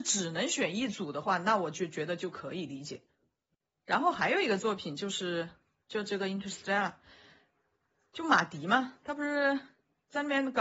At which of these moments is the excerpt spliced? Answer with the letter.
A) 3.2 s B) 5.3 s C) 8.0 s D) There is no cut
D